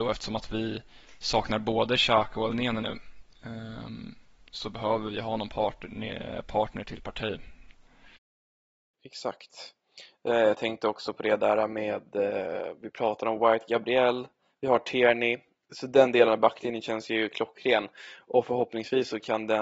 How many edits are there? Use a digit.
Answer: 0